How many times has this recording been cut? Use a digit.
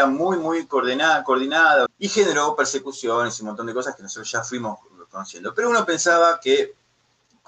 1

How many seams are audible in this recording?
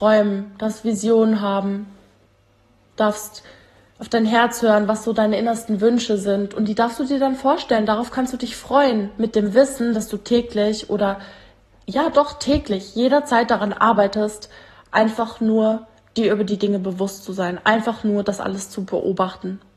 0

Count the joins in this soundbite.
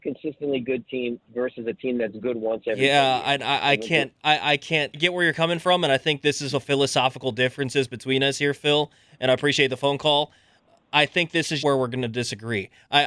2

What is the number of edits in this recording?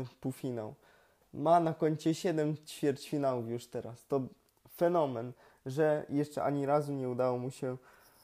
0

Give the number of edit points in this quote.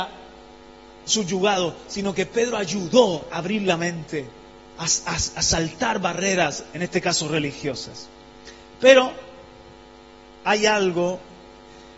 0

